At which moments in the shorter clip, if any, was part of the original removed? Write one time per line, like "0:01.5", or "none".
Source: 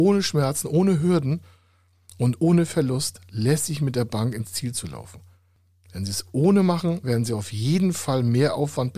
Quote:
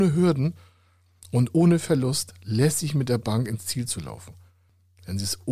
none